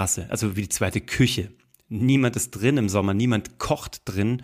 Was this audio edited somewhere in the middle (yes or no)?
no